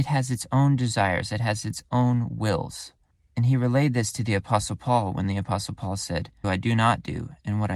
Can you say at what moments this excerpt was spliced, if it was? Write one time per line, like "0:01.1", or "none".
0:06.4